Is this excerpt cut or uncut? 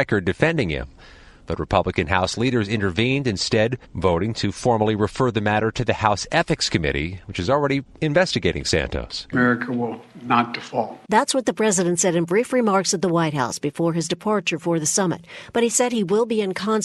cut